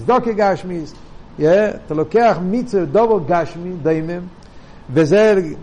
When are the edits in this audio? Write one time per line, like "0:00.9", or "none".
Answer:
none